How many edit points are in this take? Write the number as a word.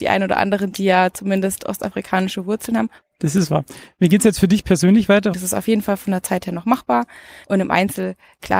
three